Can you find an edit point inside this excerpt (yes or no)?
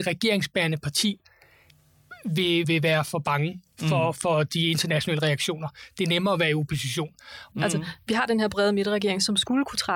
yes